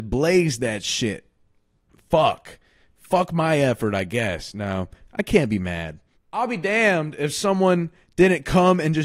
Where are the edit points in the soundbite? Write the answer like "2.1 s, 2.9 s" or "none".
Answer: 6.1 s